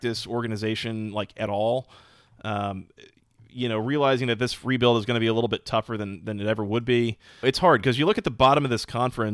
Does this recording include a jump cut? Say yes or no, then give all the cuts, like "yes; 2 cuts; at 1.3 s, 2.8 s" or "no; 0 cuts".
yes; 1 cut; at 7.4 s